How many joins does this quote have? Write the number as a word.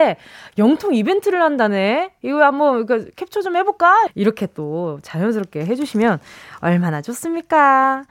one